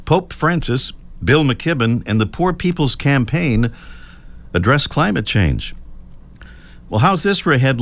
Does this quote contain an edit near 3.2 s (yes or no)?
no